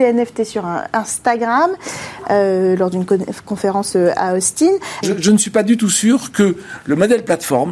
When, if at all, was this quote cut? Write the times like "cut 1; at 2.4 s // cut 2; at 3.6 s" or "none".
cut 1; at 5.0 s